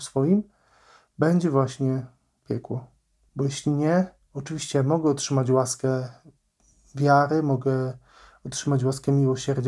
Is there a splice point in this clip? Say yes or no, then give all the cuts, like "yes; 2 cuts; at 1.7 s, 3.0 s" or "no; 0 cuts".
yes; 1 cut; at 3.3 s